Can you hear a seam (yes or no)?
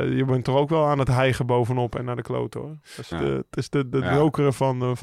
yes